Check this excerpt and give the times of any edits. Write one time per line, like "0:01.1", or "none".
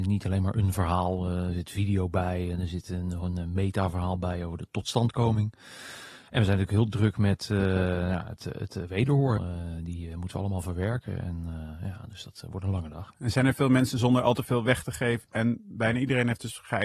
0:09.4
0:15.2